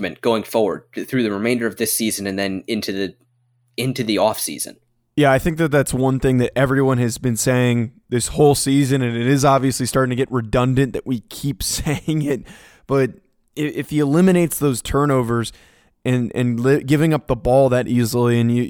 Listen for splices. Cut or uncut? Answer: uncut